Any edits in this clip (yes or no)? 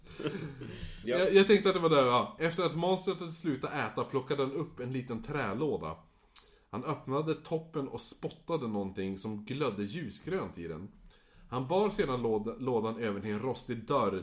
yes